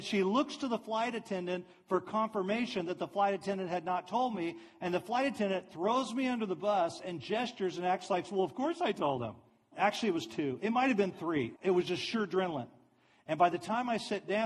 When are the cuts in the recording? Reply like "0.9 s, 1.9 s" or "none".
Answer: 9.7 s, 11.5 s